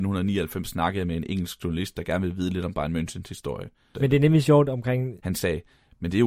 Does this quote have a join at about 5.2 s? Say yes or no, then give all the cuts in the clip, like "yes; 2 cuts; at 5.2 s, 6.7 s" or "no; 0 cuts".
yes; 2 cuts; at 3.9 s, 5.2 s